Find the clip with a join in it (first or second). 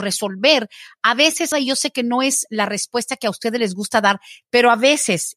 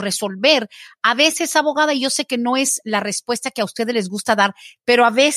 first